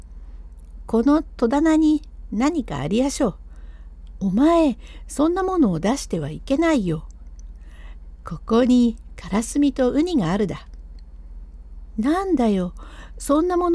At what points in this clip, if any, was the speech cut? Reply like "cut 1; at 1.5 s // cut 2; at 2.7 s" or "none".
cut 1; at 4.1 s